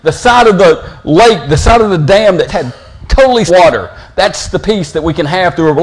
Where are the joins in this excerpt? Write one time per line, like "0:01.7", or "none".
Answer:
0:02.5
0:03.5